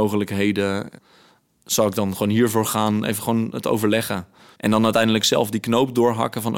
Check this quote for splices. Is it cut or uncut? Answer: cut